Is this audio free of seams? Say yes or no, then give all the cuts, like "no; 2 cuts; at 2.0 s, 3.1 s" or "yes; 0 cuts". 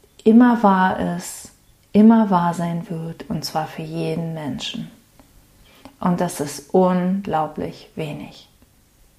yes; 0 cuts